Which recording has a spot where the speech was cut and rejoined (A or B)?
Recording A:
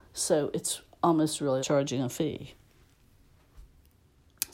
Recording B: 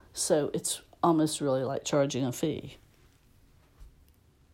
A